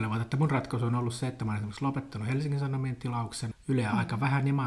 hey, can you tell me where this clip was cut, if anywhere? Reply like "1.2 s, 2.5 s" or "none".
3.5 s